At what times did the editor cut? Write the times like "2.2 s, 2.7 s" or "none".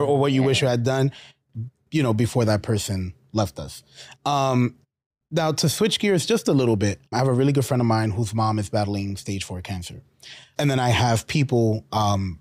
7.1 s, 10.6 s